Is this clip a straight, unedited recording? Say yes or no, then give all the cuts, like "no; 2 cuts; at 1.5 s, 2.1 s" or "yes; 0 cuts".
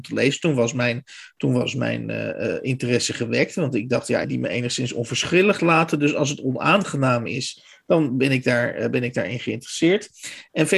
no; 1 cut; at 4.2 s